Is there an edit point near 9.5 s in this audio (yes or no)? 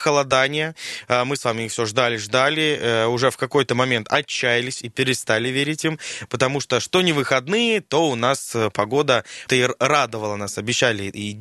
yes